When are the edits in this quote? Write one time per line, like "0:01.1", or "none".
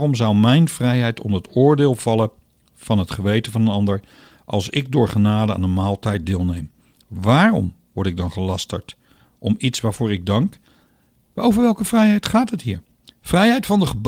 none